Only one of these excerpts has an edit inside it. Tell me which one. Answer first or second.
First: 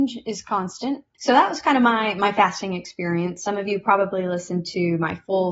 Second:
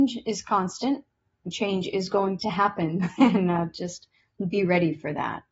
first